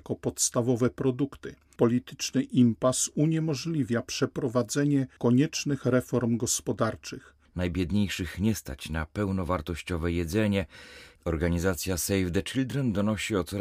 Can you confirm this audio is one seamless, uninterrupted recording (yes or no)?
no